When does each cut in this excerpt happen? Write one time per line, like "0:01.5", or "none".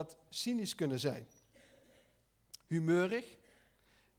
none